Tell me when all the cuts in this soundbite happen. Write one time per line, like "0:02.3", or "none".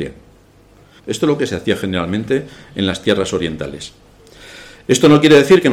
0:01.0